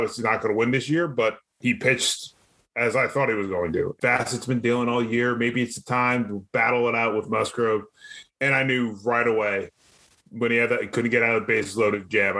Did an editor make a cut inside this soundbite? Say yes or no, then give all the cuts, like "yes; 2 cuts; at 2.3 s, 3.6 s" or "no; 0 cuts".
yes; 1 cut; at 4.0 s